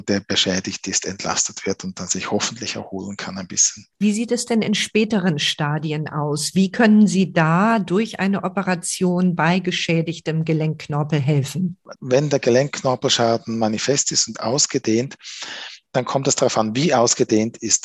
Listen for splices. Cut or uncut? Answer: cut